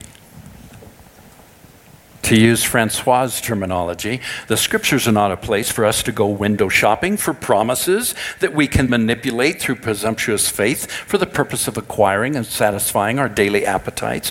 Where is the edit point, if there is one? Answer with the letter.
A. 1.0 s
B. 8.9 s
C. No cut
B